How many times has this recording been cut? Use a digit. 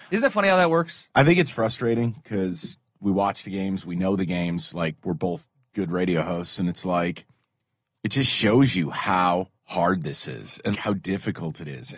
2